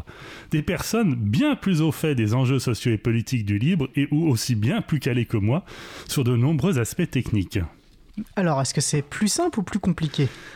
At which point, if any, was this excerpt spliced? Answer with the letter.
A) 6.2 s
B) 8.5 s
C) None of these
C